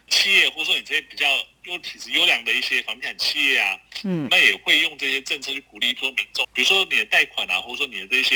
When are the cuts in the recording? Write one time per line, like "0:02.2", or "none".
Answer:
0:04.3
0:06.4